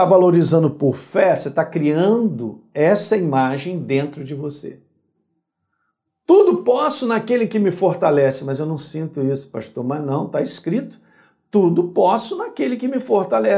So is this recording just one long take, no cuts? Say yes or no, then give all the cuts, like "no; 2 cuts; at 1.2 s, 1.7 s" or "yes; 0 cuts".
yes; 0 cuts